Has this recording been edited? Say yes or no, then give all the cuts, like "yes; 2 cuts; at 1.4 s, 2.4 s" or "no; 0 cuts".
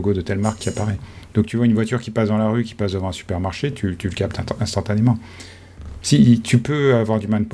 no; 0 cuts